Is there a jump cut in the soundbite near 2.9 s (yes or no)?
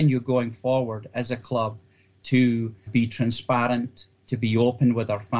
yes